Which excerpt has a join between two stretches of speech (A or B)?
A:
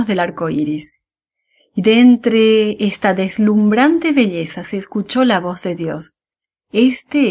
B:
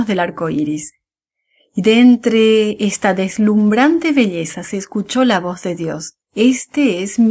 B